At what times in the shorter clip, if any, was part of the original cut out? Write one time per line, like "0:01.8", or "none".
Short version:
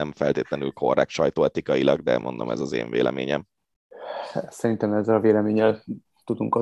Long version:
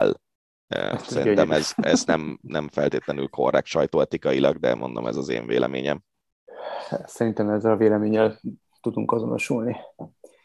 none